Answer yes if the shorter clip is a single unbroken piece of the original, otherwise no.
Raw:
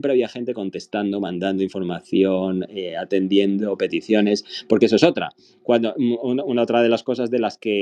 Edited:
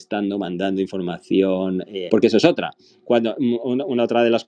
no